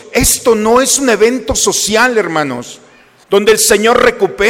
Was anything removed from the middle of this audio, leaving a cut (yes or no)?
yes